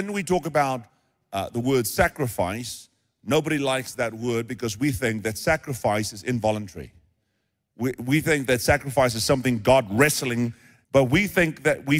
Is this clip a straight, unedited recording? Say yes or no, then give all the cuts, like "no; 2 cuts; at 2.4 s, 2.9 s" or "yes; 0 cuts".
no; 1 cut; at 10.8 s